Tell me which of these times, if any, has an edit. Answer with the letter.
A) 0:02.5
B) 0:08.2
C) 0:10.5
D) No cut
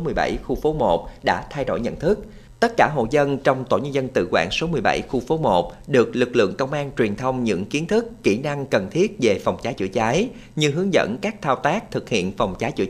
A